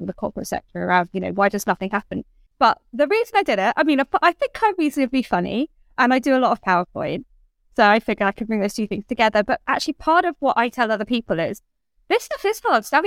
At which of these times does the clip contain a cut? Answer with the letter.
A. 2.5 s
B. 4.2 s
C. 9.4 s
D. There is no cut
A